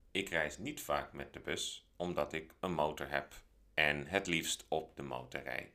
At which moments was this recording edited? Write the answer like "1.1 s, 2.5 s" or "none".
none